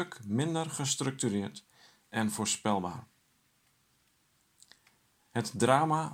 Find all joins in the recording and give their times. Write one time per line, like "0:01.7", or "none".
none